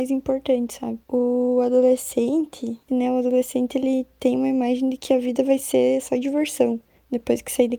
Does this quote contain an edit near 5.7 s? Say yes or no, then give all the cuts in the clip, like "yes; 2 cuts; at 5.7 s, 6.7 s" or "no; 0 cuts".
no; 2 cuts; at 1.0 s, 2.9 s